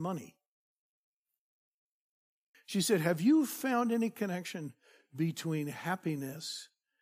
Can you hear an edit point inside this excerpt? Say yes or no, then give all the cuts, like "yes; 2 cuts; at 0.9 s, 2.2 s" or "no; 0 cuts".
yes; 1 cut; at 2.5 s